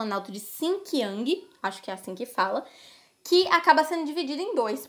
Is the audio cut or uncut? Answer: uncut